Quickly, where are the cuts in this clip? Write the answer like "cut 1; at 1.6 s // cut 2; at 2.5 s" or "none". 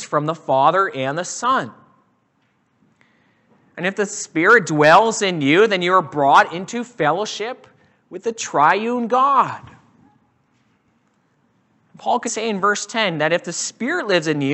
cut 1; at 12.3 s